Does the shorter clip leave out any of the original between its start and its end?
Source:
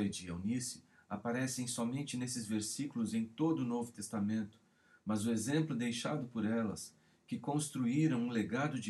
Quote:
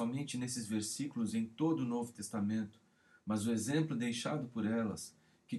no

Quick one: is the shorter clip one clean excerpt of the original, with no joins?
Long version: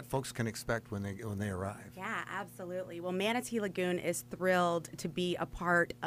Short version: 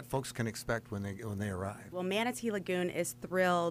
no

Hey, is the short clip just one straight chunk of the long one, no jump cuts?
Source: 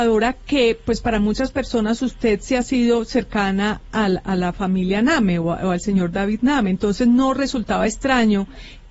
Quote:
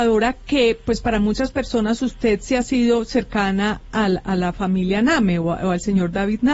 yes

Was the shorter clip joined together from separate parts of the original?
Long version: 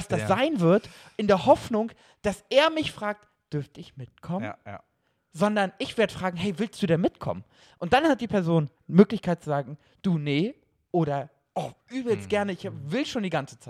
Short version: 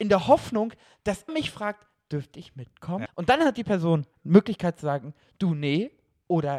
yes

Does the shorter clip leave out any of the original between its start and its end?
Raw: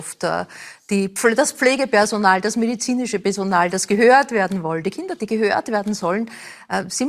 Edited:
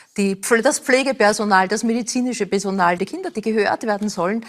yes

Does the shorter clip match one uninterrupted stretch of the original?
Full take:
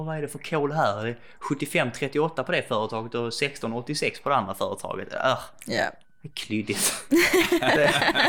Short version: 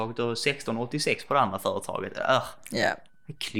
yes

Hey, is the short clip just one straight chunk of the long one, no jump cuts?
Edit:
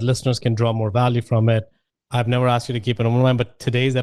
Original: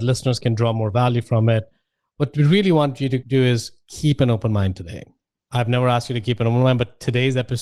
no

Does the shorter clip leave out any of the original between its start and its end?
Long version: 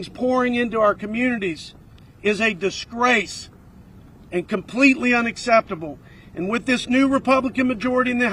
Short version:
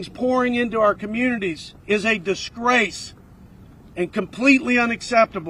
yes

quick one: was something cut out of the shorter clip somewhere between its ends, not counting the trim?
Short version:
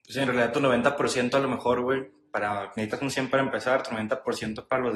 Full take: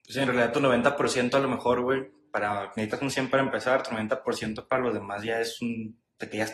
no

